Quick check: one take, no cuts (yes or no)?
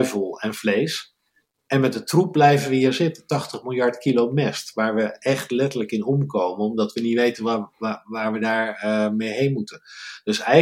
yes